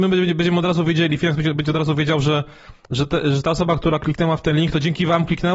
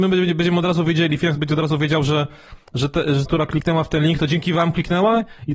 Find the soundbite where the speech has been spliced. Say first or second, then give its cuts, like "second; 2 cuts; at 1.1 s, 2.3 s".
second; 2 cuts; at 1.4 s, 3.3 s